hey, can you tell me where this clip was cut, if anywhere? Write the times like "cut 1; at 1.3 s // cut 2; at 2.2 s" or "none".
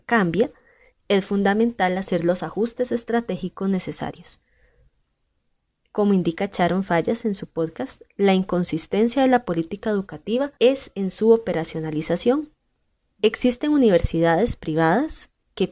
cut 1; at 10.6 s